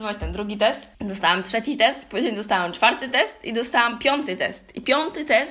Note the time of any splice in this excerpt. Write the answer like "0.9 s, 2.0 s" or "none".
0.9 s